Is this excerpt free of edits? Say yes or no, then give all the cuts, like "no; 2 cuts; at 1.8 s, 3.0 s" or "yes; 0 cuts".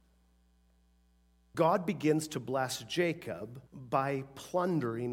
no; 2 cuts; at 1.5 s, 3.7 s